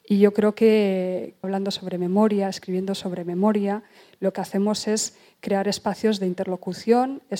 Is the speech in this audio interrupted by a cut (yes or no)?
yes